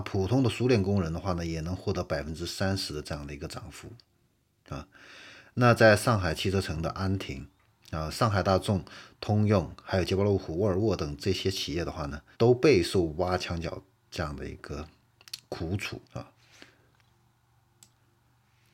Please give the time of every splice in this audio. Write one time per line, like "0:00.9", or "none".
0:12.3
0:16.0

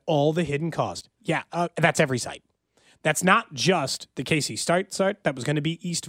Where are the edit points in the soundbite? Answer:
none

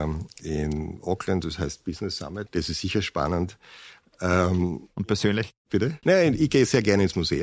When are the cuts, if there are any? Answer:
0:02.5
0:06.0

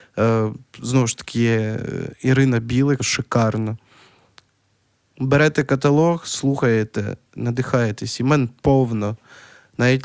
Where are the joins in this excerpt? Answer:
0:03.0
0:07.4

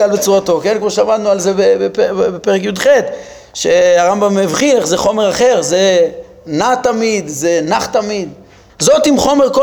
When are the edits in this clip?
0:08.7

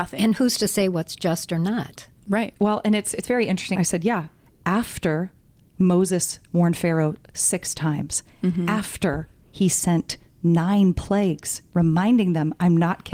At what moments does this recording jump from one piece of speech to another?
0:02.6
0:03.8

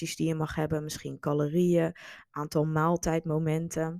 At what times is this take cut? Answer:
none

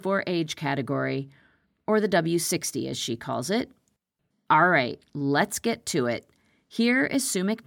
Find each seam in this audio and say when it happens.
none

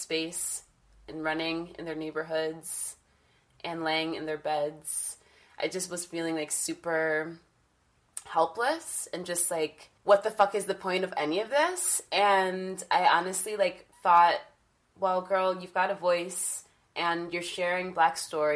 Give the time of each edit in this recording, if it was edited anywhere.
0:10.0

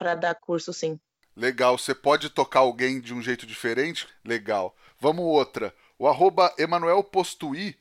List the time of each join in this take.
0:04.1

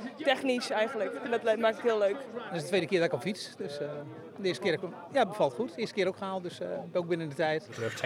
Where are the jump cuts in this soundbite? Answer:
none

